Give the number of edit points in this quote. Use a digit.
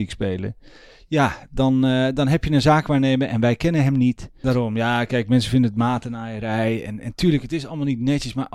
1